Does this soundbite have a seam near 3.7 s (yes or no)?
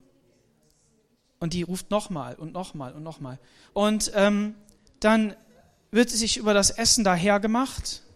yes